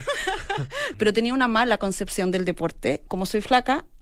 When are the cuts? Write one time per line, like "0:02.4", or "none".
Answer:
0:00.9
0:03.1

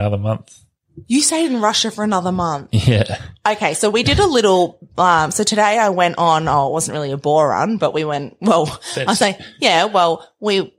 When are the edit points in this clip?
none

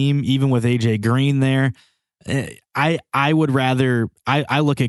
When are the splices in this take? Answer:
none

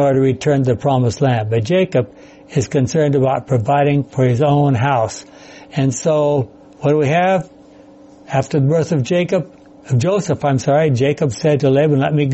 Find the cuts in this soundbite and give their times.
none

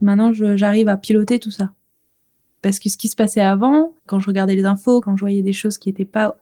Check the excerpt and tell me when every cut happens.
0:04.0
0:05.0

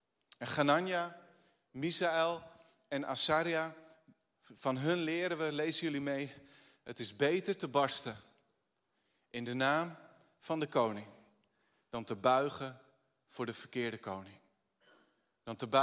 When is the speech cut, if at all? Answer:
none

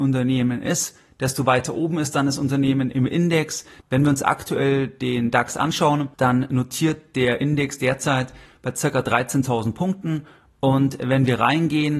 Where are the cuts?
0:03.8
0:06.1

